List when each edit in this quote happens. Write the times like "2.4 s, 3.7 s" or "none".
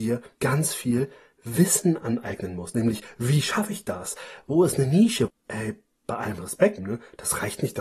5.3 s, 6.8 s